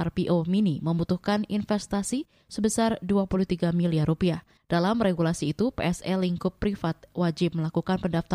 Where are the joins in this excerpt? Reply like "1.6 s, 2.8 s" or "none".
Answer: 4.6 s